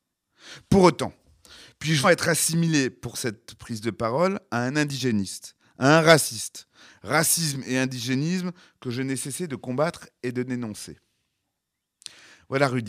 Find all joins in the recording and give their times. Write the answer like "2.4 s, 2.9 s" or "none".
2.0 s